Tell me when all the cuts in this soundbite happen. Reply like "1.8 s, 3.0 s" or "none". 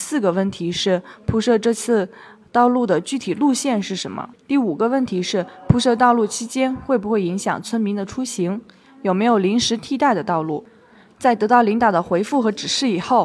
none